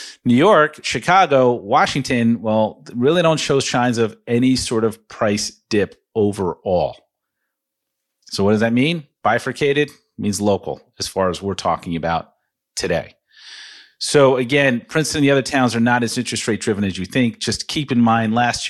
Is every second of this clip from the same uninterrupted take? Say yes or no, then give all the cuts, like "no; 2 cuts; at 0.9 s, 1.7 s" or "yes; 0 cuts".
yes; 0 cuts